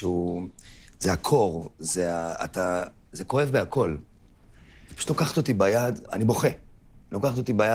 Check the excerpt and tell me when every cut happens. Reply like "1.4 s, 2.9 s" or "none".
6.0 s